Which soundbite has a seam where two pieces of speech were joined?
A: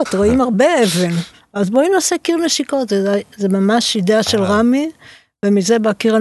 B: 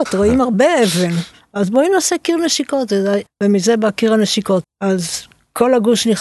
B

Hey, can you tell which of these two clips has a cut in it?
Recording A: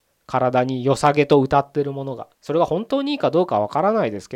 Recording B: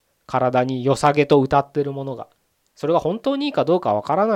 A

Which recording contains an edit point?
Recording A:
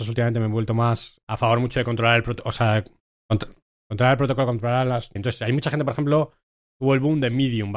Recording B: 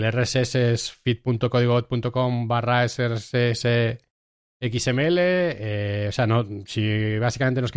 A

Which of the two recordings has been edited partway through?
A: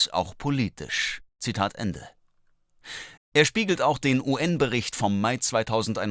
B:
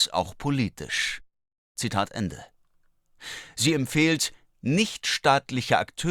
A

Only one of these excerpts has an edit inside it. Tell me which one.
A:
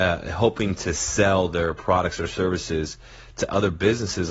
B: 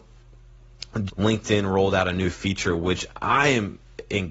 B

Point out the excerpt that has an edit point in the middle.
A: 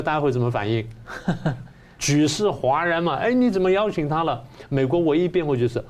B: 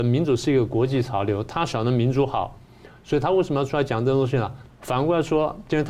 B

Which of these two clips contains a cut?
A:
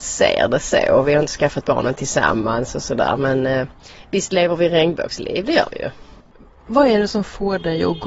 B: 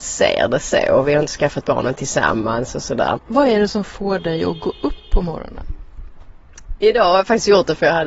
B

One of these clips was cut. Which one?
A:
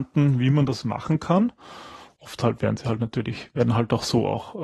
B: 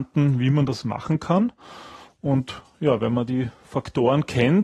A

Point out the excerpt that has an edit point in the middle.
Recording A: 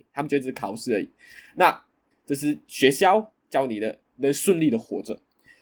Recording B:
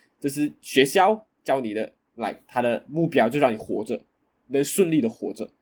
A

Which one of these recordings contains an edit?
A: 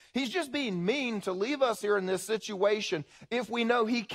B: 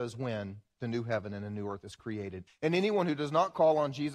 B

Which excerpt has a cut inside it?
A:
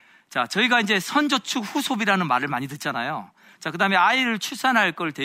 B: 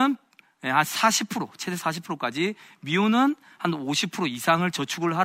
A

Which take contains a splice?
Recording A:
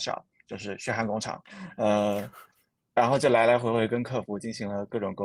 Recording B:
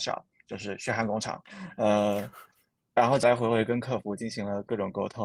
B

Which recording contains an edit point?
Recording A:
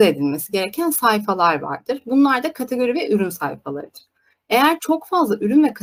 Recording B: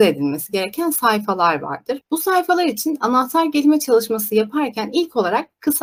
B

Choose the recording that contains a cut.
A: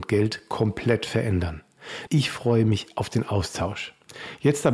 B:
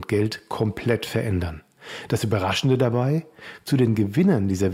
A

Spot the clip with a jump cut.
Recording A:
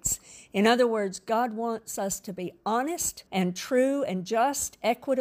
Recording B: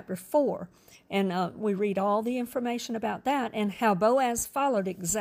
A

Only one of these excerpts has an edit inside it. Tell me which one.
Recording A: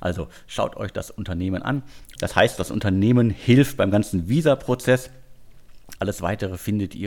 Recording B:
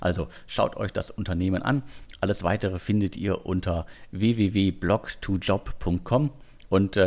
A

